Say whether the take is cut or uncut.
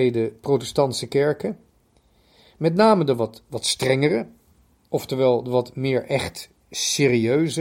uncut